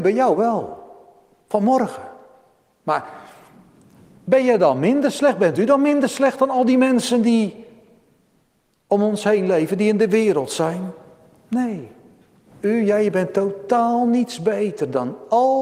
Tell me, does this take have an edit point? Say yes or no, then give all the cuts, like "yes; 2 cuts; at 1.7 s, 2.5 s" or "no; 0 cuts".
no; 0 cuts